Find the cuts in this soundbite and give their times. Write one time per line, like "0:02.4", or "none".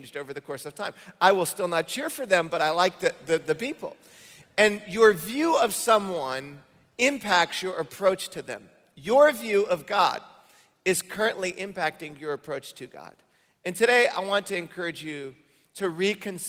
none